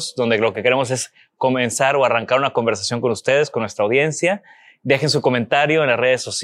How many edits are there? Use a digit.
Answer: 0